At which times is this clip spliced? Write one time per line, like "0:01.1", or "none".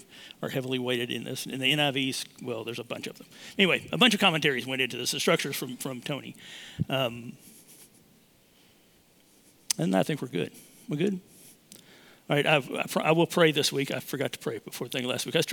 none